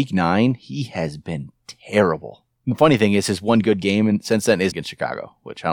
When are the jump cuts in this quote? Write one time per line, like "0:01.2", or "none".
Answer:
0:02.5
0:04.7